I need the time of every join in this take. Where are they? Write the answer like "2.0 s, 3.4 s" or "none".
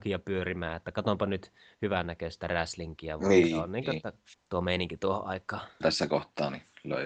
4.3 s, 5.8 s